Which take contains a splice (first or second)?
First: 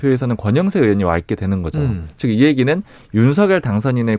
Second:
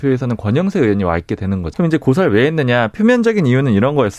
second